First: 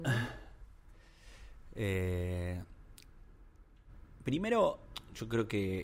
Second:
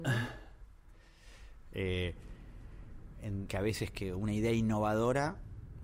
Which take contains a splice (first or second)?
second